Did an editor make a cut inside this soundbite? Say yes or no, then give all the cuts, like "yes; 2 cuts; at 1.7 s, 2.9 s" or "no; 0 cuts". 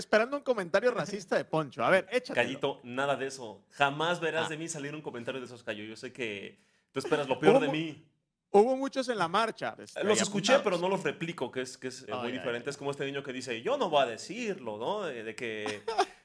yes; 2 cuts; at 9.8 s, 12.1 s